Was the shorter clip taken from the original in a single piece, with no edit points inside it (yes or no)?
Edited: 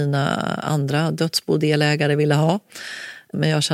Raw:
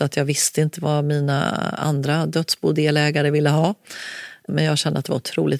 yes